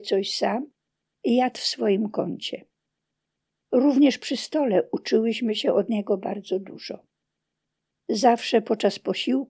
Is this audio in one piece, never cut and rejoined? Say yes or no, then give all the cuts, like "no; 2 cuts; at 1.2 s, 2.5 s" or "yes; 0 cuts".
yes; 0 cuts